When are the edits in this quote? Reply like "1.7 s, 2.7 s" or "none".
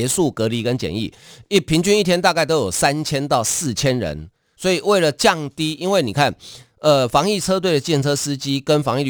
4.5 s